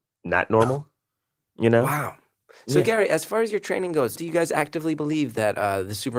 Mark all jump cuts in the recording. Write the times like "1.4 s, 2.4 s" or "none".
4.2 s